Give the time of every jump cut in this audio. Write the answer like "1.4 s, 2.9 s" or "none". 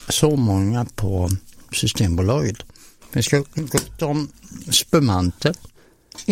none

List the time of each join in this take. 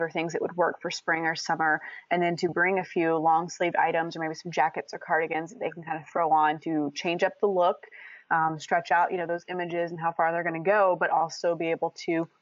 none

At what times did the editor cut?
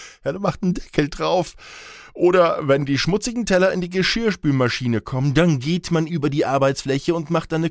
6.1 s

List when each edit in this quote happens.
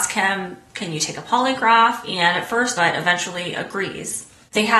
2.7 s

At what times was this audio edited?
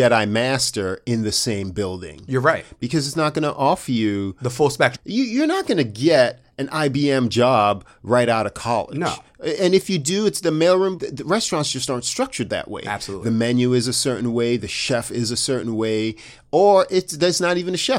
4.9 s, 11.0 s

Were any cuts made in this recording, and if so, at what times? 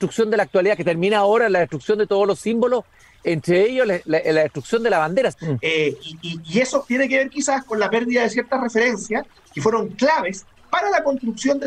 5.3 s

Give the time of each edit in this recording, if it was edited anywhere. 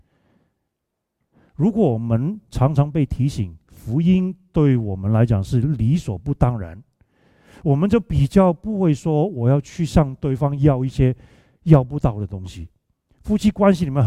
none

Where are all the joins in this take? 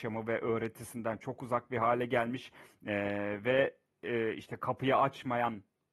none

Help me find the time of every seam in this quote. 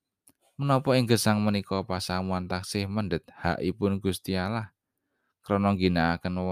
none

